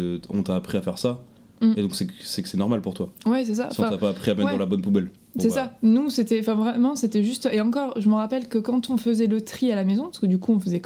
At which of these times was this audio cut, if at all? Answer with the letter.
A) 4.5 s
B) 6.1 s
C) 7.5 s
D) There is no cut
D